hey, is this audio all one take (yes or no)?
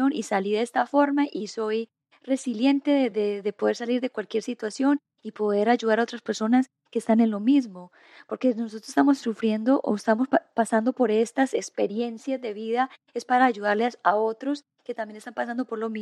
yes